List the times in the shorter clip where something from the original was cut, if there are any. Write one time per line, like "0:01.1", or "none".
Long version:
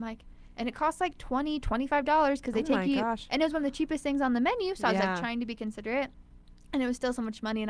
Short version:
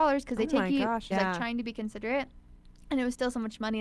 0:01.1